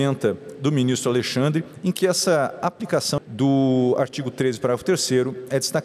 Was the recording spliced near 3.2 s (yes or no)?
yes